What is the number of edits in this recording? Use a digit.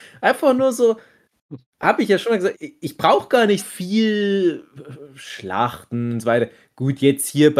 2